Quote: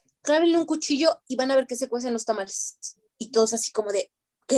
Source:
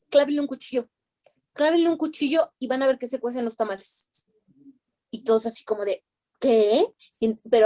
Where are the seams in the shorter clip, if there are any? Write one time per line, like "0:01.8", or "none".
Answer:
0:03.1